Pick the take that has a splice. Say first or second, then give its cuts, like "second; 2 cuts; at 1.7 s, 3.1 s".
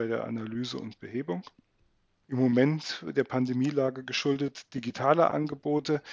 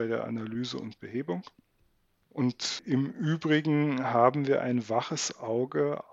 first; 1 cut; at 2.2 s